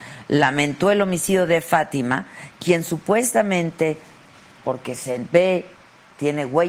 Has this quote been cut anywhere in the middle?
no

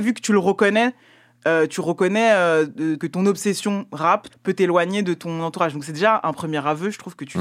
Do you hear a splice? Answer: yes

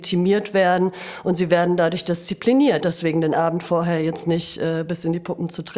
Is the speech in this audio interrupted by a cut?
yes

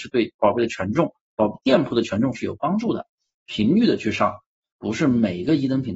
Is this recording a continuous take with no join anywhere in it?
no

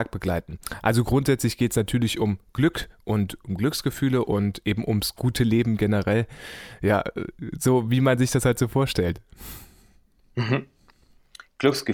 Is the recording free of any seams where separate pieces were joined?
yes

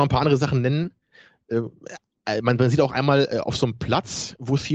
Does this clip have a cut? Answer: no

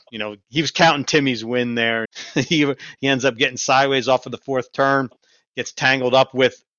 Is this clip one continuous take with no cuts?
no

